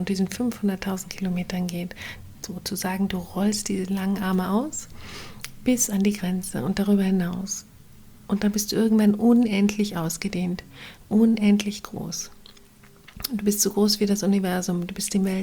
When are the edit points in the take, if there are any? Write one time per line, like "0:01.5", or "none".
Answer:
none

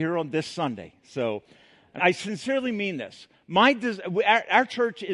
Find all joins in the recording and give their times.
0:02.0

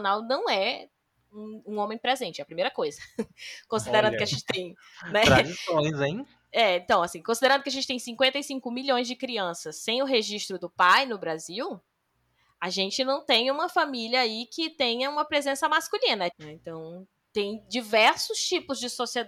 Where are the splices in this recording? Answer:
0:16.3

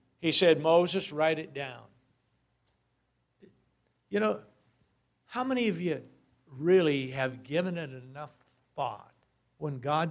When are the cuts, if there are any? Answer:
none

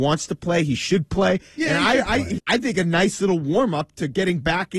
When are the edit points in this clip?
0:02.4

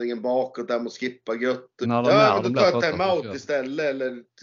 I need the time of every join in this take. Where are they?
0:01.8

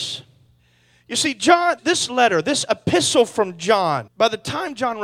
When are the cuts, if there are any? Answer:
0:01.8
0:04.1

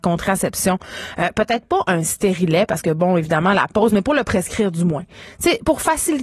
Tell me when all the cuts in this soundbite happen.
none

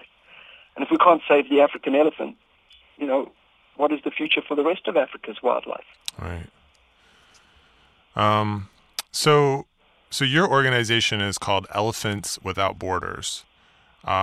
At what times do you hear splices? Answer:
none

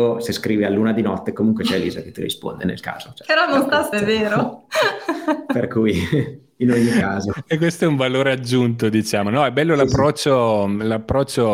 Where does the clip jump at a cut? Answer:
0:03.9

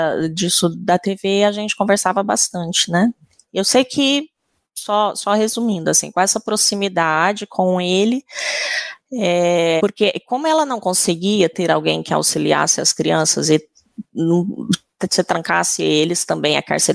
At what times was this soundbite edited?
0:09.8

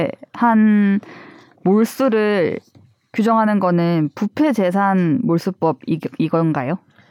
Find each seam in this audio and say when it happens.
none

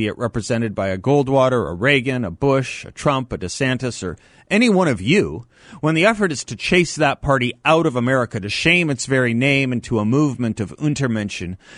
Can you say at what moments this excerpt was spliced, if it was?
none

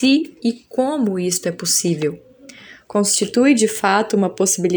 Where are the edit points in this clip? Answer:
0:02.8

